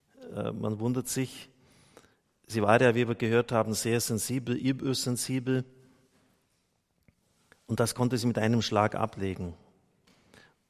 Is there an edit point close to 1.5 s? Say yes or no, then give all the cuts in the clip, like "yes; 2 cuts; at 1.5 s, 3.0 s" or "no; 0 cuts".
no; 0 cuts